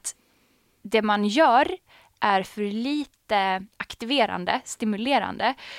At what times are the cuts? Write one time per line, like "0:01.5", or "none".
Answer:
none